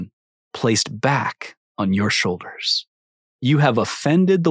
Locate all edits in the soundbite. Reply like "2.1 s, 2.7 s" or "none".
none